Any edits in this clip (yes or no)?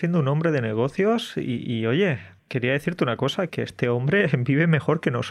yes